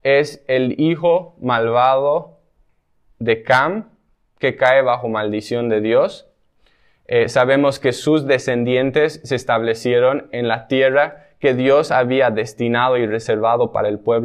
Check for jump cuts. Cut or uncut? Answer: uncut